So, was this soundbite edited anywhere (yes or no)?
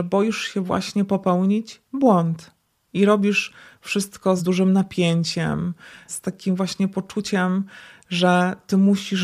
yes